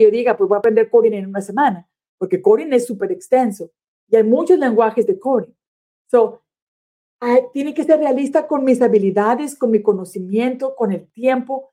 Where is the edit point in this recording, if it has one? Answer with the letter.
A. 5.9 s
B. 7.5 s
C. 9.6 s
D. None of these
D